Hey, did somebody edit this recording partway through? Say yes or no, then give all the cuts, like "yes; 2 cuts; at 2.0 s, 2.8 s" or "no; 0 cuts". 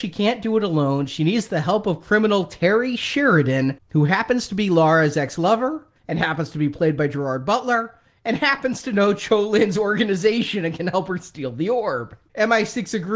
no; 0 cuts